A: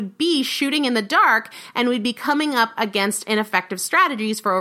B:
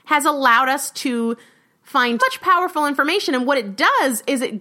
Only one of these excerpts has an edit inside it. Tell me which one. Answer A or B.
B